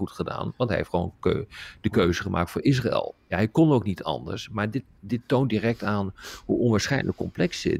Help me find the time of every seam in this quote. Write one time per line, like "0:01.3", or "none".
none